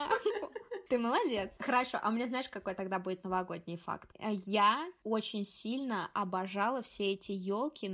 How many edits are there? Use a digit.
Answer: 0